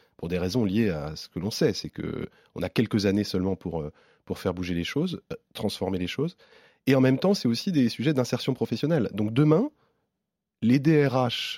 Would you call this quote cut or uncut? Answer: uncut